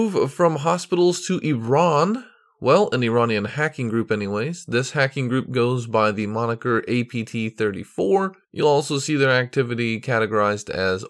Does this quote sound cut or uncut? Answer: cut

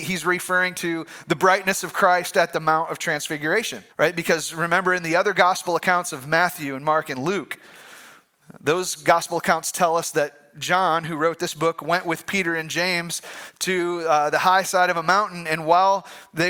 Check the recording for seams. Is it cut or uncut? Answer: cut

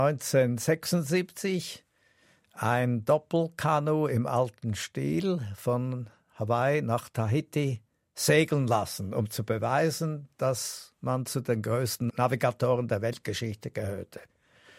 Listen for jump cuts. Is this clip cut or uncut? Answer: uncut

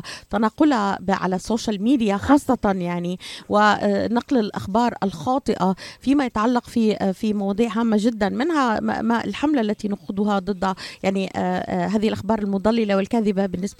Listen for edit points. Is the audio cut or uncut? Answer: uncut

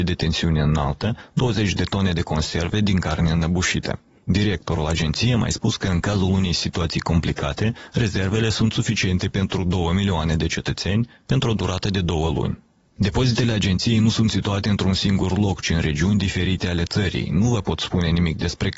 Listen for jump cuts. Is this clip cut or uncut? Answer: cut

